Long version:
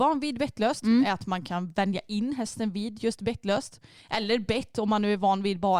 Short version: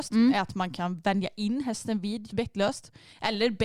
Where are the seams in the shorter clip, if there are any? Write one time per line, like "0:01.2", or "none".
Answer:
0:02.3